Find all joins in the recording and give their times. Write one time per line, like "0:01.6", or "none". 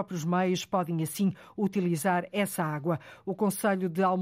none

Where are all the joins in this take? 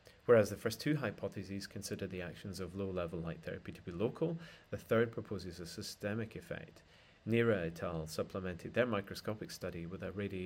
none

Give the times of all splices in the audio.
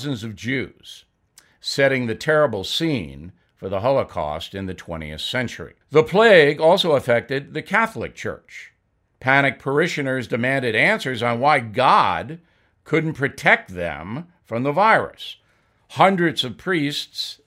0:05.8

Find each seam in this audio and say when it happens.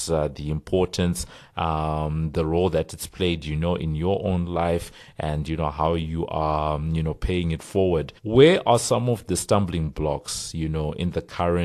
0:08.2

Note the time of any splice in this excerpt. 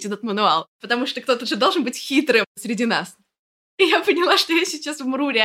0:03.7

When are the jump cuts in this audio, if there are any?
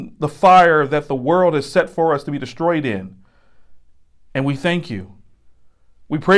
none

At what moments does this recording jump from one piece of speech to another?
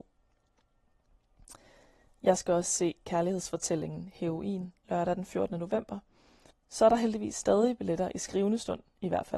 0:04.8
0:06.5

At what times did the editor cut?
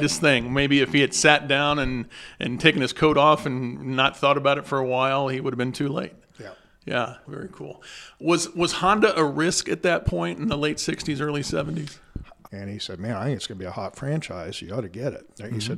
0:07.2
0:12.5

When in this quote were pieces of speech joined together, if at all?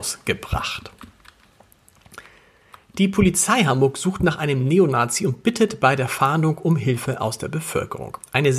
none

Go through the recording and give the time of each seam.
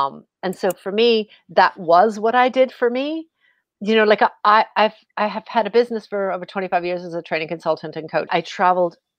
0:04.7
0:08.3

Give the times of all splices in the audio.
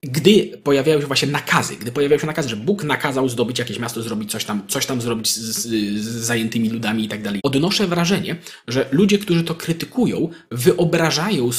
0:07.4

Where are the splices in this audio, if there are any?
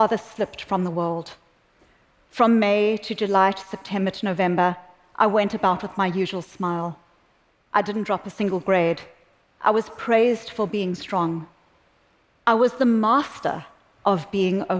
0:09.4

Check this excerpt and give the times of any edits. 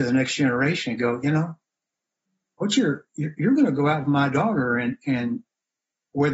none

